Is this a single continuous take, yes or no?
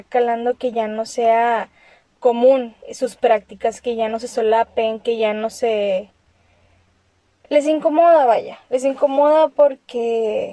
no